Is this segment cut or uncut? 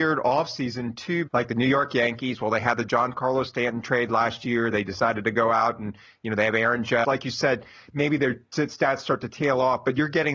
cut